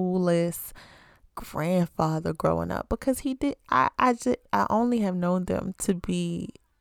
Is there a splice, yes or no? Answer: yes